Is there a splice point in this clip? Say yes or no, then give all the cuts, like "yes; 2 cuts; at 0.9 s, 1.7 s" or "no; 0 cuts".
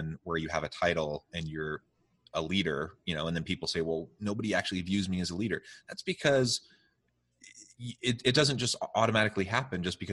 no; 0 cuts